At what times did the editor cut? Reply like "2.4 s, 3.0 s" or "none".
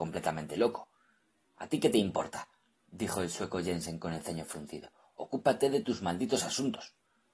none